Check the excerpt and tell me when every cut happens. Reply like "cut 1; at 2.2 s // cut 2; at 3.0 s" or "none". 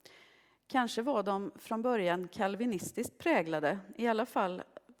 none